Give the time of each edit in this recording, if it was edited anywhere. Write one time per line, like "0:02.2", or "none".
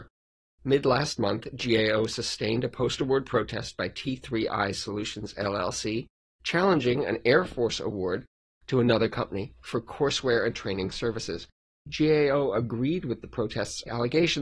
none